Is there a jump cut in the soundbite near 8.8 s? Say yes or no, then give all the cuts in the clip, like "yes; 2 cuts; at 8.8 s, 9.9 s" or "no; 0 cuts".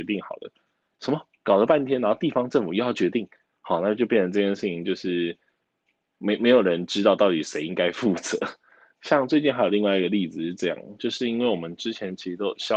no; 0 cuts